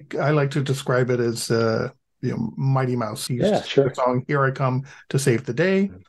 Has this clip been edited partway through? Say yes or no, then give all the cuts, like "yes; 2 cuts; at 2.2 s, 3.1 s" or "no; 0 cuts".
yes; 1 cut; at 3.3 s